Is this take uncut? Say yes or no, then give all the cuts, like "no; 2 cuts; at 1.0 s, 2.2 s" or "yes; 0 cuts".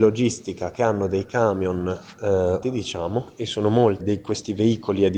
no; 2 cuts; at 2.6 s, 4.0 s